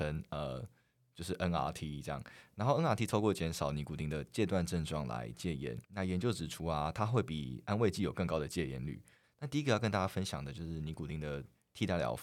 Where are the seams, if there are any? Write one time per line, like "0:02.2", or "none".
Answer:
0:05.8
0:09.2